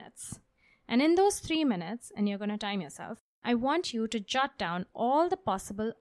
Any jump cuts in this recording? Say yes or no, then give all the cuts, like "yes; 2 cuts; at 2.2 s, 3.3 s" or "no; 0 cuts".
no; 0 cuts